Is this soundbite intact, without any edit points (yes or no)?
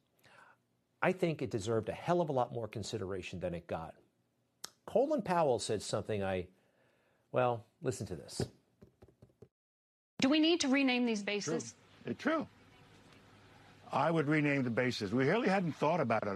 yes